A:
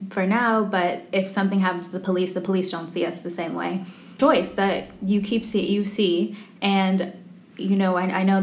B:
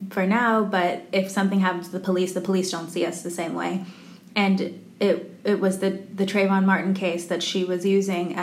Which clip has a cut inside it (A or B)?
A